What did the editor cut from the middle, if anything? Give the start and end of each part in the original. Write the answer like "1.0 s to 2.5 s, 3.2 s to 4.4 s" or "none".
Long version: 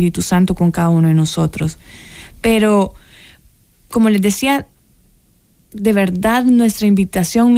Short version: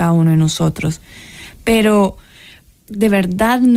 3.6 s to 5.7 s